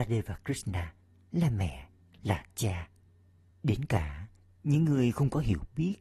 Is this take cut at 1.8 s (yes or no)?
no